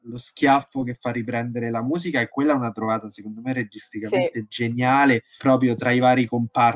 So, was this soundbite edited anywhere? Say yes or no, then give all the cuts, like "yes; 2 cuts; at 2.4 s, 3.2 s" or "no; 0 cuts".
yes; 1 cut; at 5.4 s